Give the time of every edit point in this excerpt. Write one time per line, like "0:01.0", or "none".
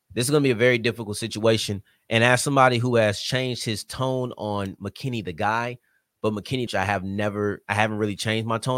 0:06.7